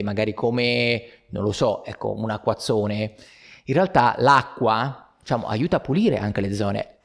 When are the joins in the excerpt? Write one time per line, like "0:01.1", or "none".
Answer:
none